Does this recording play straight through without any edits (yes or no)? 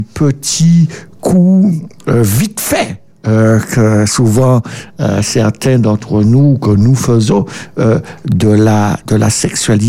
yes